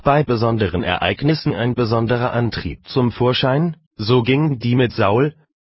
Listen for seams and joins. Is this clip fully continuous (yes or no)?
yes